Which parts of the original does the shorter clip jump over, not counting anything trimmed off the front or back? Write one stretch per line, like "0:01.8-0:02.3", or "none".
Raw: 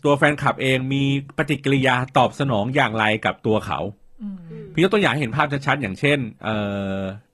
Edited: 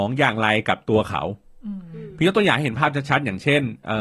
none